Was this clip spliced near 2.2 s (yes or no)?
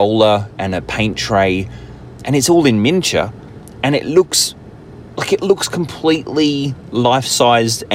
no